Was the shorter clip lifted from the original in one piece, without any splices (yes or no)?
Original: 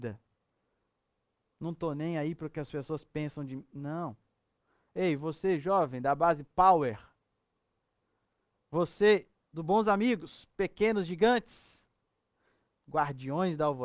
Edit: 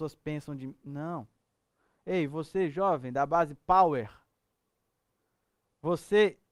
yes